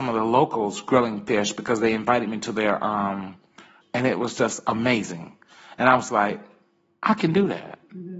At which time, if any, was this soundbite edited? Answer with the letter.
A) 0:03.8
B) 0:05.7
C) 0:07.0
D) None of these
A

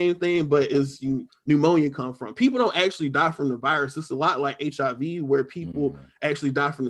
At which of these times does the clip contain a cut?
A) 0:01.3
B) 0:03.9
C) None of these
A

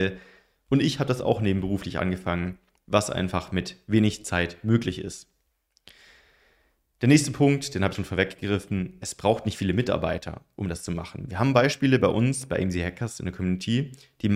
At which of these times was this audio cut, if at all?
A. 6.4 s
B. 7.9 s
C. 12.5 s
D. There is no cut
B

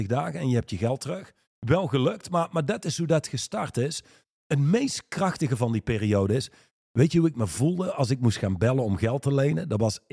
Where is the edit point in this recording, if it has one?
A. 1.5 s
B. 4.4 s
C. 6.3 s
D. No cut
A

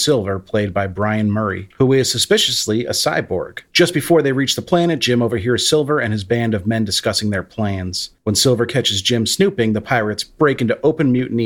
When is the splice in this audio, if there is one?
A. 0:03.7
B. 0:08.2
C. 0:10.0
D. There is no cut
D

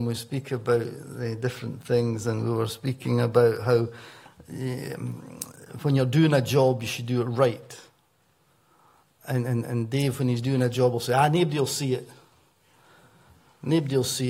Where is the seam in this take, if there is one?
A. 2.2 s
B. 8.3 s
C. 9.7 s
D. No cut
D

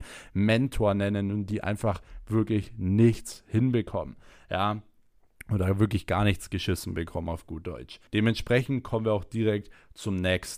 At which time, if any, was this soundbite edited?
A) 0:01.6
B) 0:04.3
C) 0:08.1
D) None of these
C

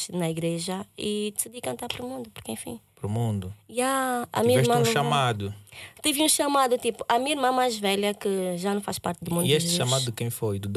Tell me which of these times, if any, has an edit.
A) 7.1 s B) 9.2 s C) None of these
B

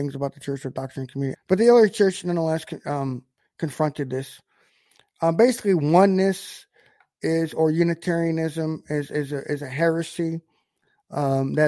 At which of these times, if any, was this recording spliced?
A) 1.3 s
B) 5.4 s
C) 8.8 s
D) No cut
A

